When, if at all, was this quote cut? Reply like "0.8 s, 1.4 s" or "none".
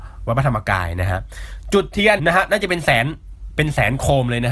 2.2 s